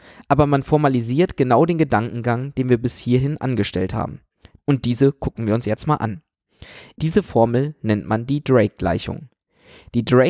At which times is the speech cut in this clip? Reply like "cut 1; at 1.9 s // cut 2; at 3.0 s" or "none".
cut 1; at 4.6 s // cut 2; at 6.9 s